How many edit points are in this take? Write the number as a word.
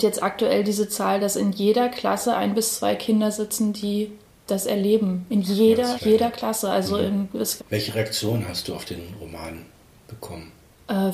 two